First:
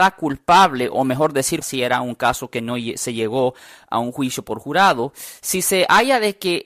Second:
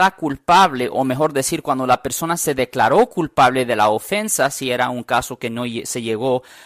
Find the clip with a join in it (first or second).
first